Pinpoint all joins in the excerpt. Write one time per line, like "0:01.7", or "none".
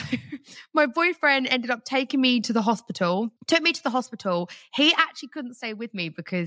0:03.4